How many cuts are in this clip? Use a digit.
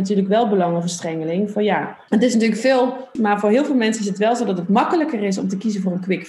2